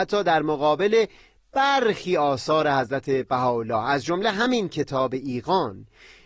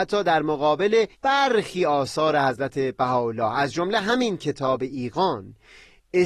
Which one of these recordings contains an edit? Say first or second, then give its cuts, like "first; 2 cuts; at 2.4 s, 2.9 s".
second; 1 cut; at 1.1 s